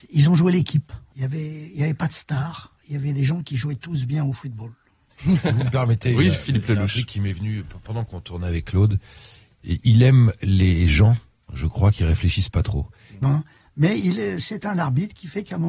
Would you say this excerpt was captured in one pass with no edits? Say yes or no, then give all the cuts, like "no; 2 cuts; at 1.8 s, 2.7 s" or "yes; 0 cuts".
no; 2 cuts; at 9.8 s, 13.2 s